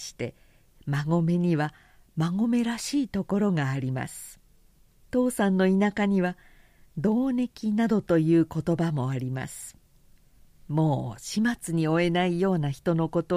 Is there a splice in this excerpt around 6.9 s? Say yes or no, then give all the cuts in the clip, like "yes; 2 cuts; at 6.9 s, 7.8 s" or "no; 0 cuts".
no; 1 cut; at 5.0 s